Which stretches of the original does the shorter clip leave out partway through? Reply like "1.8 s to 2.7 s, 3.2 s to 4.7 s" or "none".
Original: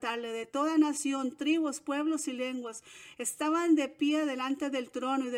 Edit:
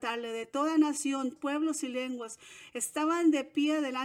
1.4 s to 1.8 s